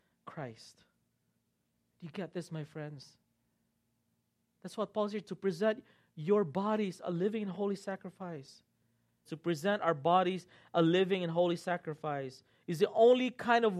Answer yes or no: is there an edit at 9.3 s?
yes